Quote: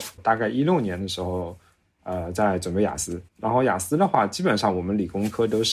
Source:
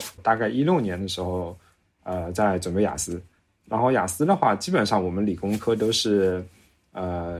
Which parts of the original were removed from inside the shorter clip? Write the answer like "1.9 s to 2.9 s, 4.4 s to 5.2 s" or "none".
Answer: 3.3 s to 3.6 s